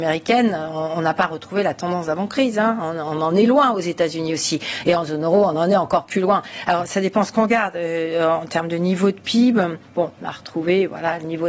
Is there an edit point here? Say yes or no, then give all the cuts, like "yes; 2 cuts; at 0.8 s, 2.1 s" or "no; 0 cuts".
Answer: no; 0 cuts